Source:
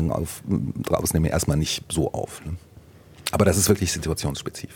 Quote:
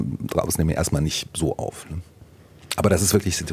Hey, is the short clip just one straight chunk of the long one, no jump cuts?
yes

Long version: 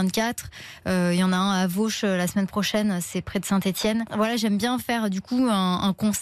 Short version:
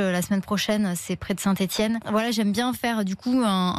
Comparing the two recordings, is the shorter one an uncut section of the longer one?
yes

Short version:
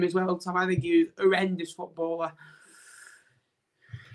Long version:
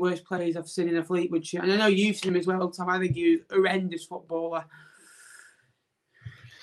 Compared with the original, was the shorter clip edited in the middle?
no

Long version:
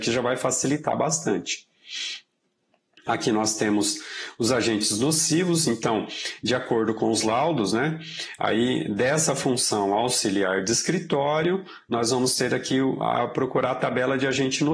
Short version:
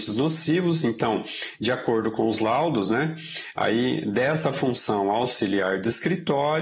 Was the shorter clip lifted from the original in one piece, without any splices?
yes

